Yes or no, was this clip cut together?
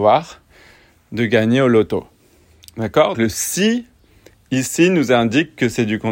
yes